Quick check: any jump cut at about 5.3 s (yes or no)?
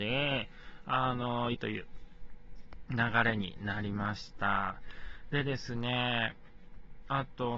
no